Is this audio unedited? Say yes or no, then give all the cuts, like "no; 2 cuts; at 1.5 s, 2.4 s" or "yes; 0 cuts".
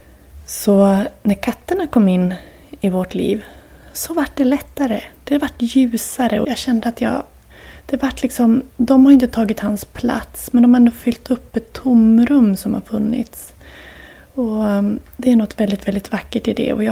no; 1 cut; at 6.4 s